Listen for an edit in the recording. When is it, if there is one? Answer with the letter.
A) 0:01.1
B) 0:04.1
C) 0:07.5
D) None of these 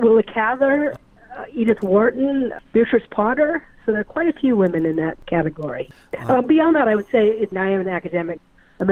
C